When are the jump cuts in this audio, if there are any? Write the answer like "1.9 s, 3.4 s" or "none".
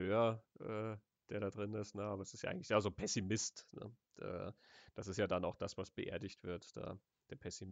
none